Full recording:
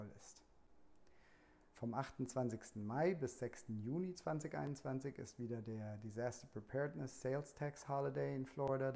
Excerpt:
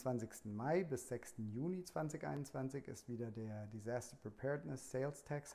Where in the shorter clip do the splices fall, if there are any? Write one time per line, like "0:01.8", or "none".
none